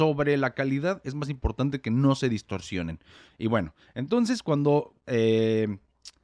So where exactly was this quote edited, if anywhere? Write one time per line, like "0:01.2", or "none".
0:03.3
0:05.0